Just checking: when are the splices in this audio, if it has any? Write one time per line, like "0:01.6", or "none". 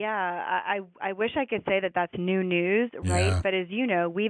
none